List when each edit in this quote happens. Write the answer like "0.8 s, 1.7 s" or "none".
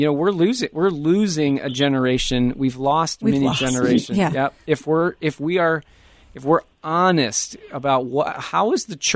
none